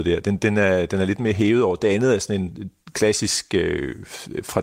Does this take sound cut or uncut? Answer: uncut